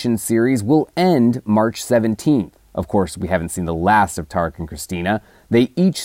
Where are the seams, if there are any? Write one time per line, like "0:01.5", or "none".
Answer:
0:02.6